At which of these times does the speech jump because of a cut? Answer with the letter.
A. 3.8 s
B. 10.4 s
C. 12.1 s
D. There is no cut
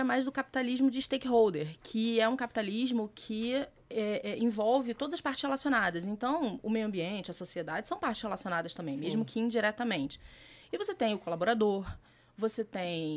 D